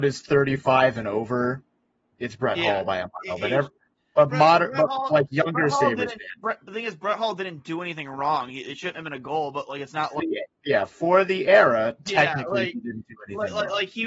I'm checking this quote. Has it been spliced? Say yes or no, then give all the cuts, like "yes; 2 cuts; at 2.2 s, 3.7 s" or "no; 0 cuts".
yes; 1 cut; at 10.2 s